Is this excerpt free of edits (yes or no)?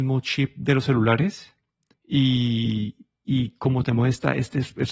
yes